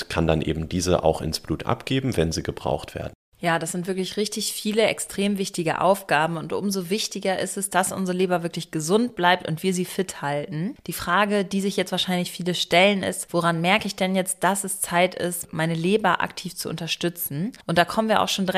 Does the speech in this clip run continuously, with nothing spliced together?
yes; 0 cuts

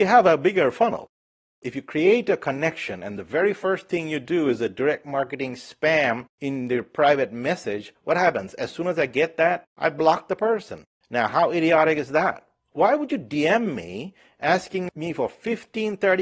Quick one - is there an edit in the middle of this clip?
yes; 1 cut; at 11.0 s

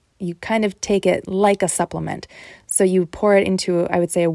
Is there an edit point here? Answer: no; 0 cuts

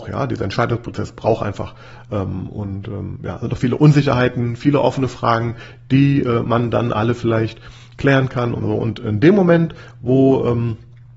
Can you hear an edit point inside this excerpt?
yes; 1 cut; at 8.6 s

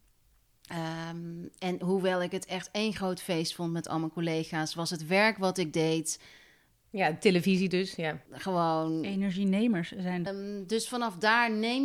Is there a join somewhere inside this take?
yes; 2 cuts; at 8.3 s, 10.3 s

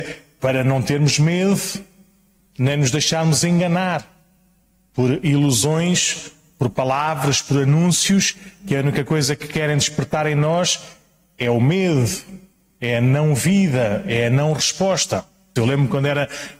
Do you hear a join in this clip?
yes; 1 cut; at 15.6 s

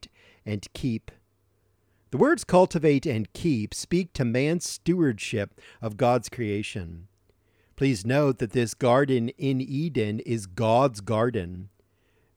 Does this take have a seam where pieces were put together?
no; 0 cuts

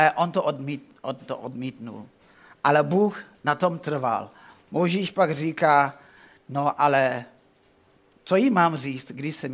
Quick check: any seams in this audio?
no; 0 cuts

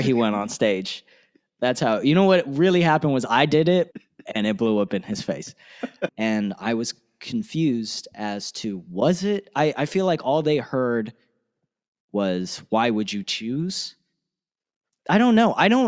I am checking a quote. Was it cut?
yes; 2 cuts; at 3.9 s, 6.1 s

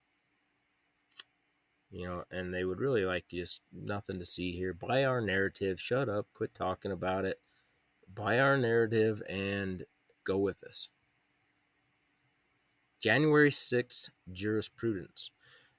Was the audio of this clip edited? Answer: yes; 1 cut; at 10.2 s

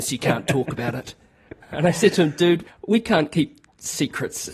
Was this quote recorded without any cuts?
no; 2 cuts; at 1.6 s, 2.7 s

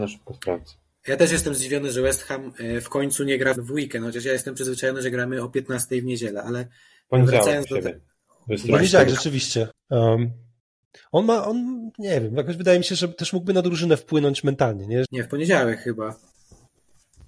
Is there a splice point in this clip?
yes; 3 cuts; at 3.6 s, 9.7 s, 15.0 s

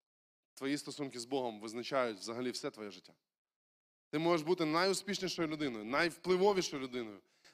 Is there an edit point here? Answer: no; 0 cuts

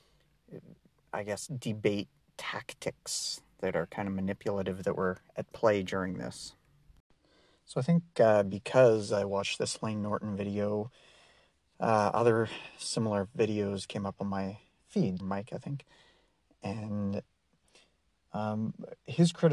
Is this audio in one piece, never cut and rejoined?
no; 1 cut; at 15.2 s

